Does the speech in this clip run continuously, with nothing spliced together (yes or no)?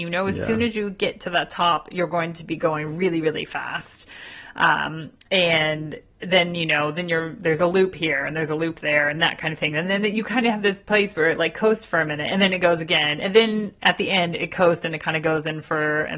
yes